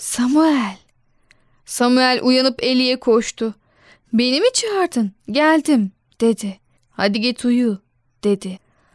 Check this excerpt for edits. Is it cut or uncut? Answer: cut